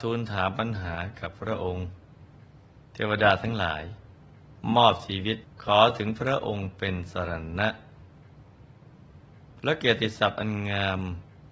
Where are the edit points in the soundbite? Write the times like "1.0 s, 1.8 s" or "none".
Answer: 5.5 s